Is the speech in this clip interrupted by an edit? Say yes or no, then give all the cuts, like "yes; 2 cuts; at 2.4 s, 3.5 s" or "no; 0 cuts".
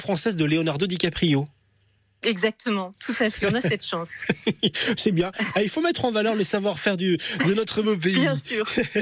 no; 0 cuts